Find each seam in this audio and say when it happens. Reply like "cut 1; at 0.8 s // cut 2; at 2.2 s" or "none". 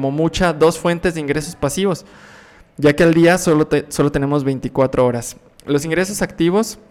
none